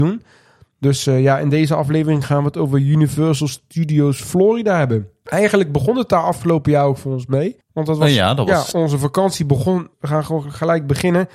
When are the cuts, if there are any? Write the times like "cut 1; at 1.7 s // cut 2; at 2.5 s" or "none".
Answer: cut 1; at 8.7 s // cut 2; at 9.9 s